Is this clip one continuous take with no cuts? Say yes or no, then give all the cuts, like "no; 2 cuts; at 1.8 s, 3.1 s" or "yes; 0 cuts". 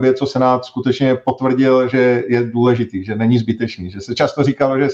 yes; 0 cuts